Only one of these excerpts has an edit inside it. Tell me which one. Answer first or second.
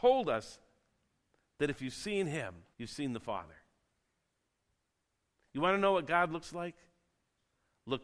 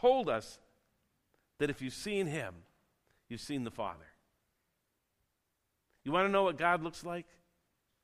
first